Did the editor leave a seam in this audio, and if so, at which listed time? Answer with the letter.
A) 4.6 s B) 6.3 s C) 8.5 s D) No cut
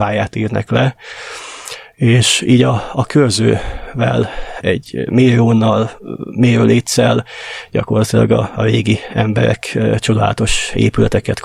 A